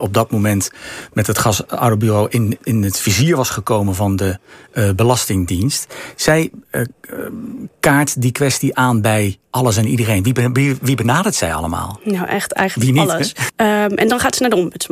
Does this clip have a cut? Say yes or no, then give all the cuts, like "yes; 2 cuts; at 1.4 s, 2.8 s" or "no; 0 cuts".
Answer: yes; 2 cuts; at 2.6 s, 13.5 s